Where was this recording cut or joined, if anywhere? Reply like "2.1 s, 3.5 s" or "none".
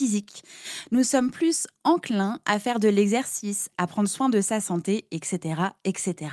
3.7 s